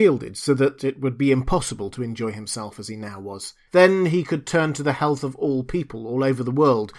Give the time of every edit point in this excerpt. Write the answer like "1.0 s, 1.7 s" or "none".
3.7 s